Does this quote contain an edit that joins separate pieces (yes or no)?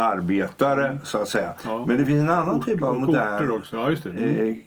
no